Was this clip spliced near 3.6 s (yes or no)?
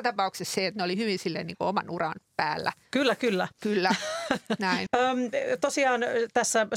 yes